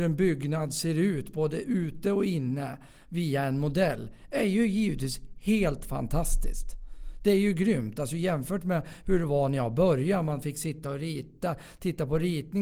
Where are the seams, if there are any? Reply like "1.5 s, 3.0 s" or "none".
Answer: none